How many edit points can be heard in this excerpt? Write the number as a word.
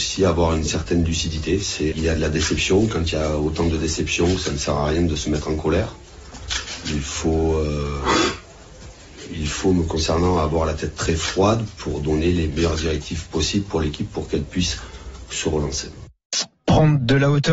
one